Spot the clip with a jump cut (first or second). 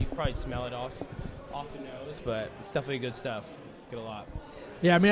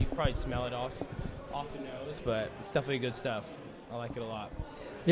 first